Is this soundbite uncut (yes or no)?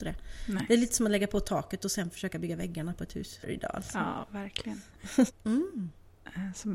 no